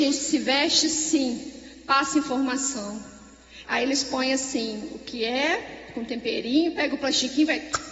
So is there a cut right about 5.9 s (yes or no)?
no